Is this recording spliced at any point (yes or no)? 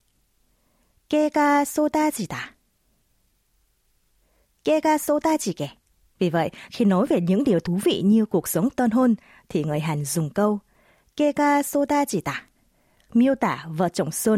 yes